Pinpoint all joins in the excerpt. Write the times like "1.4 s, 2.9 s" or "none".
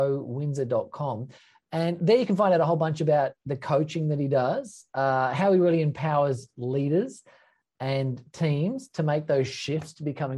none

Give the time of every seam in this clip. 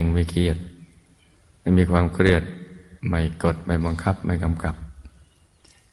3.0 s

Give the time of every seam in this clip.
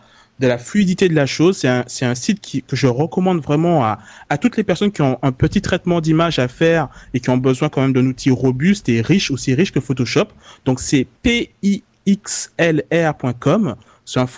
11.2 s

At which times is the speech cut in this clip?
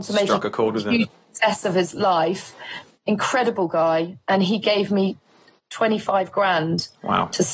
none

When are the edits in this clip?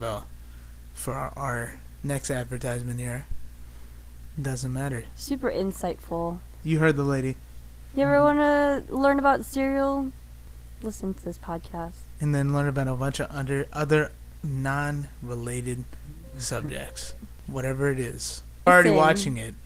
4.3 s, 18.7 s

